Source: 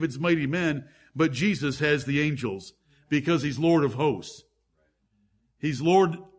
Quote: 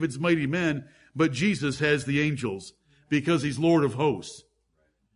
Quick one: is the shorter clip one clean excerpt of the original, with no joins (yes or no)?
yes